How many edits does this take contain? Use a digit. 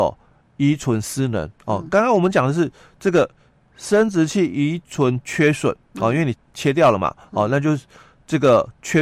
1